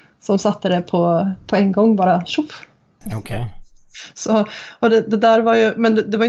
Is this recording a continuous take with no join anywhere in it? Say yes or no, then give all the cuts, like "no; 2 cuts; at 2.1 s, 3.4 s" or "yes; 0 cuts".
no; 1 cut; at 3.0 s